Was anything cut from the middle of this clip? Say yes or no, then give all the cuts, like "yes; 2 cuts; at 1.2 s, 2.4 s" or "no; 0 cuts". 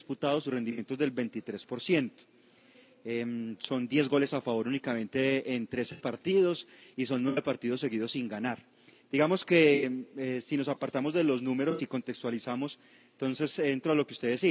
no; 0 cuts